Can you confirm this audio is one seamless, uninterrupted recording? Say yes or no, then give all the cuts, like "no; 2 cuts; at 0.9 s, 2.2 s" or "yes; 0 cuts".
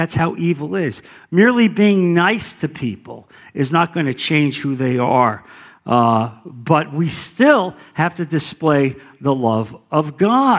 yes; 0 cuts